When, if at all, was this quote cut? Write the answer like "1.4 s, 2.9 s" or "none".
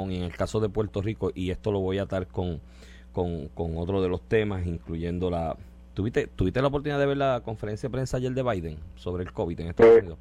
none